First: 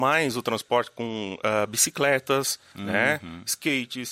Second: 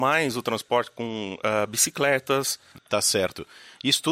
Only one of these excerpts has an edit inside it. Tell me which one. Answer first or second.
second